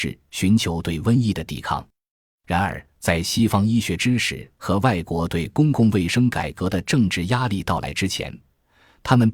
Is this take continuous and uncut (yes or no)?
yes